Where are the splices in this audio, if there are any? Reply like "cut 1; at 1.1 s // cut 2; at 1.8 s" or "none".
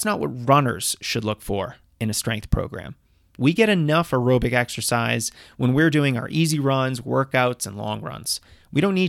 none

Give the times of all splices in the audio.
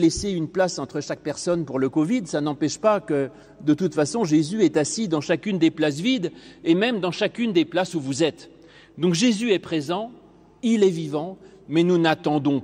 none

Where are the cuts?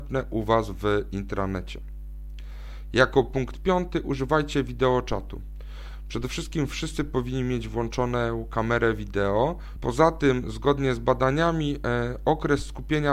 cut 1; at 9.8 s

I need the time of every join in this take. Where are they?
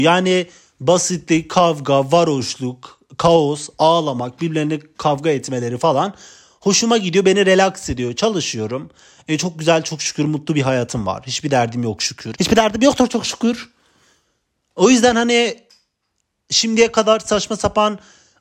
cut 1; at 12.3 s

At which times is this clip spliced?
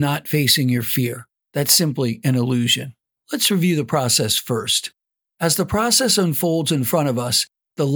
cut 1; at 1.4 s

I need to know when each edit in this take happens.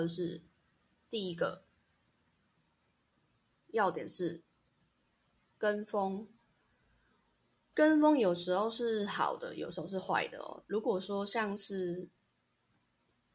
none

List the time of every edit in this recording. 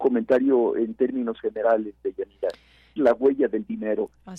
cut 1; at 3.0 s

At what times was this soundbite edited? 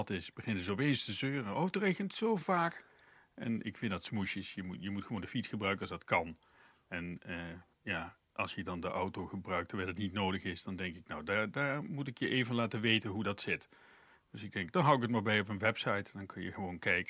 none

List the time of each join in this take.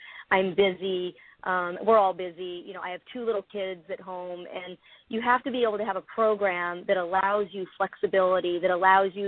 none

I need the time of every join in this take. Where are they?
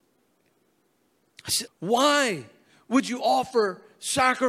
cut 1; at 1.7 s

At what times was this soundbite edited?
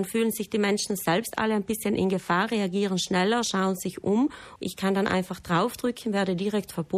cut 1; at 4.6 s

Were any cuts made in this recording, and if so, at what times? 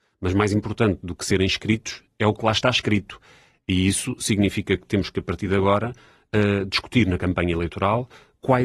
none

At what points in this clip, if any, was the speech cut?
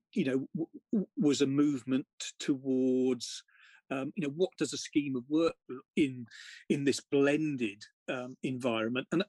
cut 1; at 4.2 s // cut 2; at 5.9 s

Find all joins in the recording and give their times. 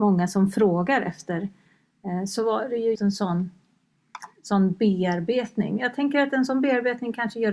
cut 1; at 3.0 s

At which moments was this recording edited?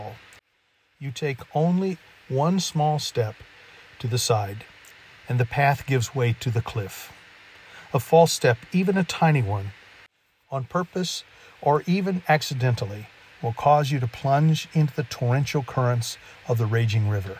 none

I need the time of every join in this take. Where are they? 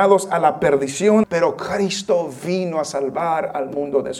cut 1; at 1.2 s

